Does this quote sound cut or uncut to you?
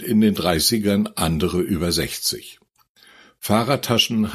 uncut